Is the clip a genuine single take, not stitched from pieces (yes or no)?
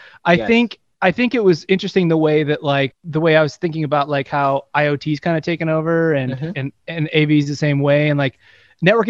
no